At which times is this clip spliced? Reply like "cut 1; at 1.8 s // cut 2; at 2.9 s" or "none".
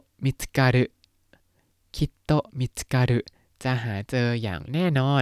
none